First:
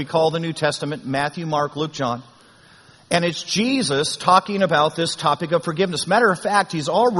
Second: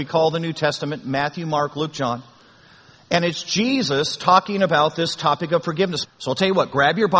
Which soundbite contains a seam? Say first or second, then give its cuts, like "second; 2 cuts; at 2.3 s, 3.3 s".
second; 1 cut; at 6.0 s